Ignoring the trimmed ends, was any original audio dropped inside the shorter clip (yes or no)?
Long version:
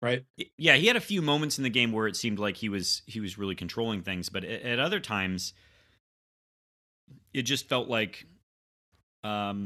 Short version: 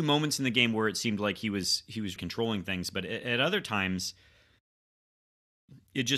yes